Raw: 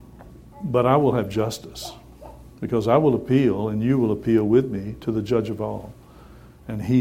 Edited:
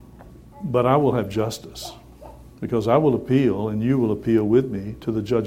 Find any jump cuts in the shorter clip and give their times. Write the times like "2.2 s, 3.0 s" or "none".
none